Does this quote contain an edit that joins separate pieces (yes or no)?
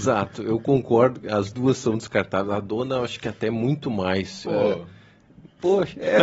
yes